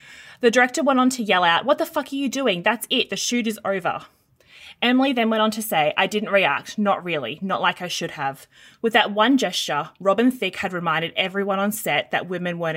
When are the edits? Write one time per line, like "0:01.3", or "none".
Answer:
none